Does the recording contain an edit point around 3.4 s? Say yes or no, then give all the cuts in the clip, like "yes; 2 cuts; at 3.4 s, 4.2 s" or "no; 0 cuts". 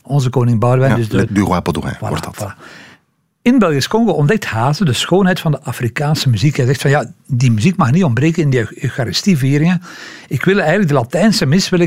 no; 1 cut; at 1.3 s